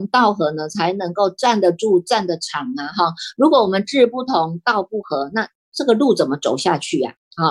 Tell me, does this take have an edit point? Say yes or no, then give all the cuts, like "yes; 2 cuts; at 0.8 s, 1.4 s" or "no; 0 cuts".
no; 0 cuts